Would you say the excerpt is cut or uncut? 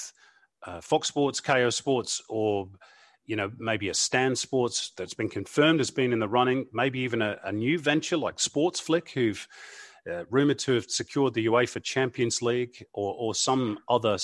uncut